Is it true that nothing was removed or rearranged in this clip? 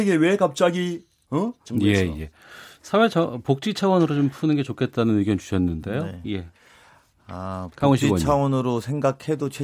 no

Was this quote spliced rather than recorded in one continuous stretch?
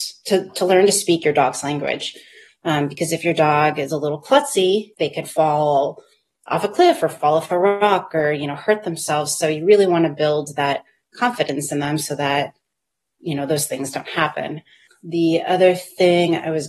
yes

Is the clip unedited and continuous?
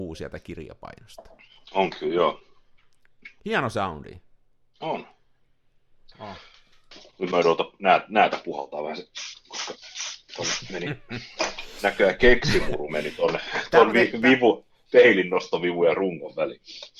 no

